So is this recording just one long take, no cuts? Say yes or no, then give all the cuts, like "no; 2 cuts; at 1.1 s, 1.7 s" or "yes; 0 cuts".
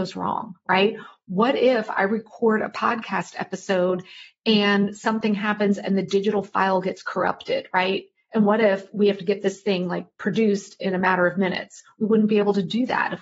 yes; 0 cuts